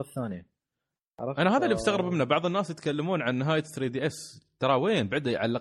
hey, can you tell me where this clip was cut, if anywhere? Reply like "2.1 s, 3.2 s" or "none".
none